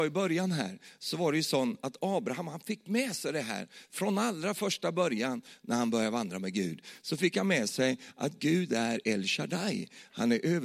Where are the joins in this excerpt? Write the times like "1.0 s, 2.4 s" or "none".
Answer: none

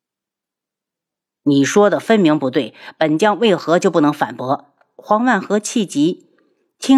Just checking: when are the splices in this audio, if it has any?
none

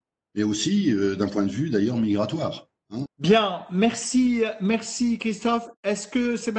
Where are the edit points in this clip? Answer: 3.1 s

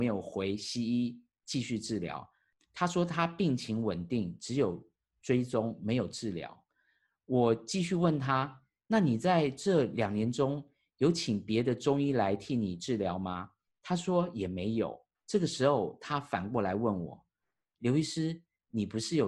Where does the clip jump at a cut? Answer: 15.1 s

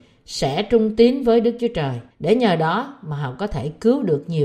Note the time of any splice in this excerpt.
2.1 s

